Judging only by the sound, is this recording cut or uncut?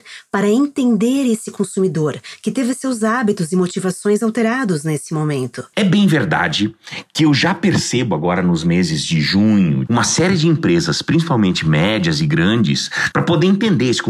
cut